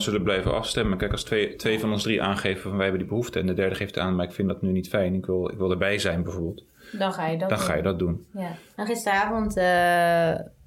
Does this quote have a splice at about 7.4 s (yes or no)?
no